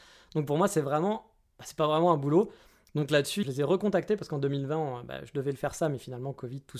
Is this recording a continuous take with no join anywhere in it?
no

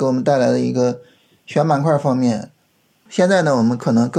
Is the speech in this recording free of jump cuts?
no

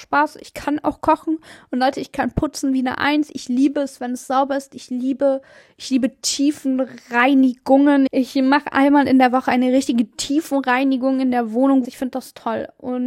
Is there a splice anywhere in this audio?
yes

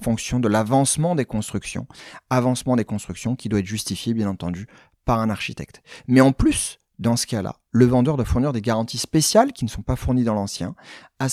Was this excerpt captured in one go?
yes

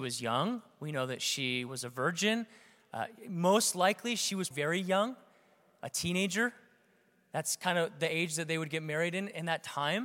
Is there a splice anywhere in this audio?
yes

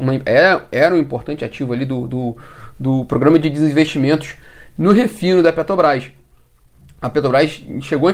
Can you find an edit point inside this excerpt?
no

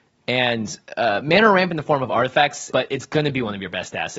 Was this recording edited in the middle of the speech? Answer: yes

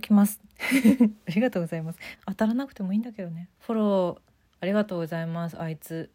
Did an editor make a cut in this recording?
yes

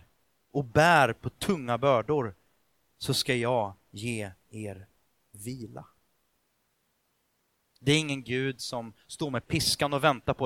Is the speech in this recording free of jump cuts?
yes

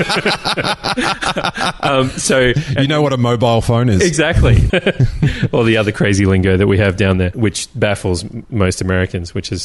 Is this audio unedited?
yes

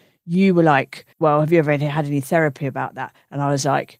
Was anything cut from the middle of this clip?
yes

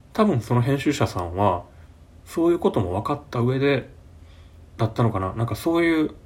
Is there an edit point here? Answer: yes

